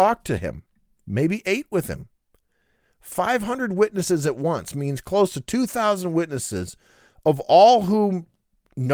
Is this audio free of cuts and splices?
yes; 0 cuts

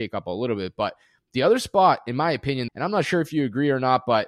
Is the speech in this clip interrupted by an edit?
yes; 1 cut; at 2.7 s

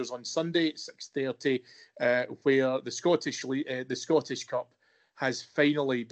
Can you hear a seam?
no; 0 cuts

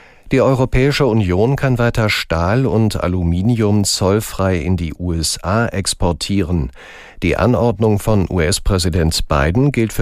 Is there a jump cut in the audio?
no; 0 cuts

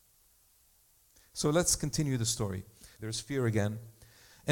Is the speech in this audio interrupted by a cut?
yes; 1 cut; at 3.0 s

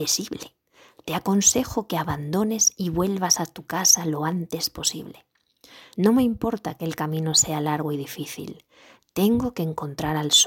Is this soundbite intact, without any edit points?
yes; 0 cuts

